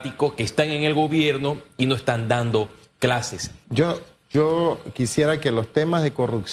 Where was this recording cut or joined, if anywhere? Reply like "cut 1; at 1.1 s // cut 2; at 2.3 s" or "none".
cut 1; at 3.6 s